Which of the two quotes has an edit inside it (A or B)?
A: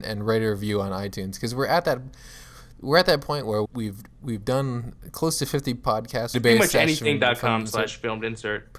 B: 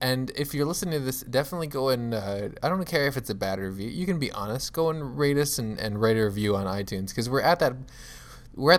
A